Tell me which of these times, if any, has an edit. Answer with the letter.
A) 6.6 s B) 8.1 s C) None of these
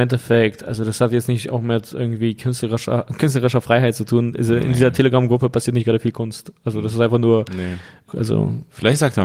B